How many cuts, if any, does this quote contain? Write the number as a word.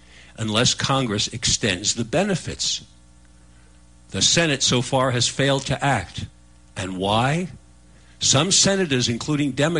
zero